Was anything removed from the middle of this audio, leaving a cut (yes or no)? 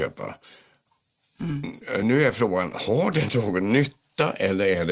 no